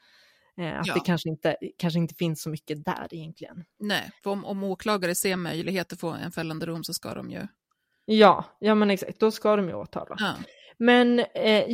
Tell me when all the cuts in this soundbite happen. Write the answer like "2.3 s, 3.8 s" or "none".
none